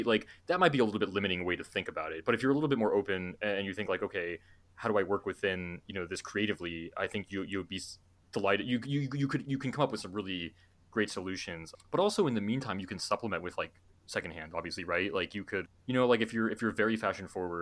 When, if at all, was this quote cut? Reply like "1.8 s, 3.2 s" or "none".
none